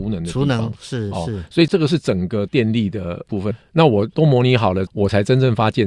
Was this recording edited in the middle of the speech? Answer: yes; 2 cuts; at 3.5 s, 4.9 s

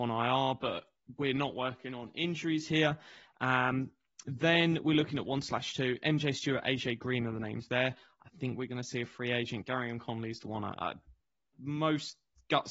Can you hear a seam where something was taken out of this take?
no; 0 cuts

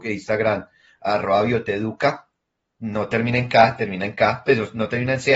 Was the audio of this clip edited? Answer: no; 0 cuts

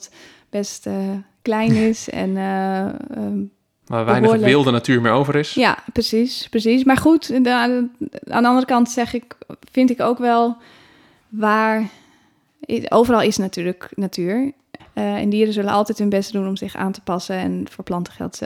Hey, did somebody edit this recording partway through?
yes; 1 cut; at 14.8 s

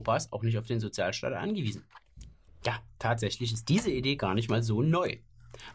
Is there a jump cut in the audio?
yes; 1 cut; at 2.5 s

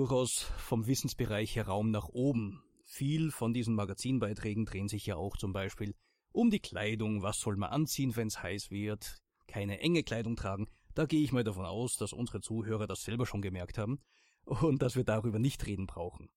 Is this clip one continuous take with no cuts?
yes; 0 cuts

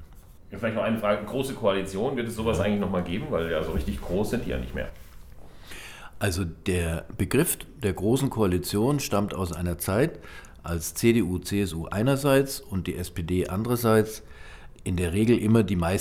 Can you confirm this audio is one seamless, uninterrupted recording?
yes; 0 cuts

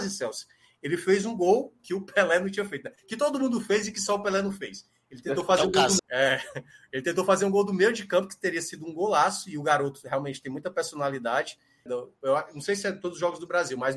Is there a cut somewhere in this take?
yes; 2 cuts; at 6.0 s, 11.9 s

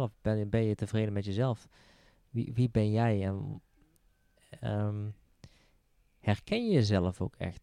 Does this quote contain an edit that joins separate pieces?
no; 0 cuts

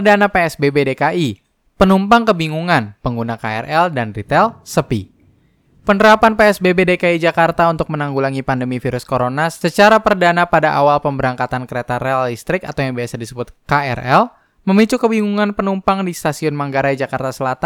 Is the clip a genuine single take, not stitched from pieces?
yes; 0 cuts

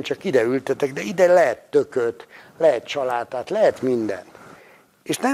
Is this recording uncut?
yes; 0 cuts

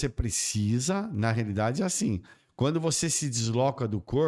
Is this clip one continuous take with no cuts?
yes; 0 cuts

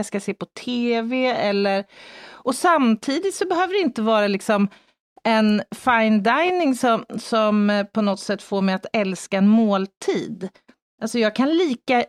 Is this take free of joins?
yes; 0 cuts

